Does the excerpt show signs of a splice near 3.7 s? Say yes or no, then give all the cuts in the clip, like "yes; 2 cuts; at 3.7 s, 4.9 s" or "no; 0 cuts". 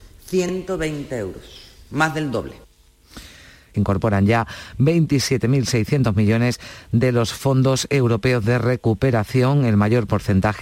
yes; 1 cut; at 3.7 s